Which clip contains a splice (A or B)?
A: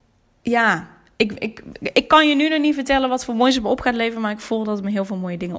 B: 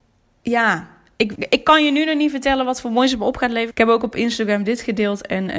B